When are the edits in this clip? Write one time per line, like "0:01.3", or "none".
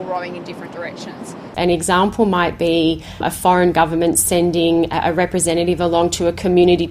0:01.5
0:03.2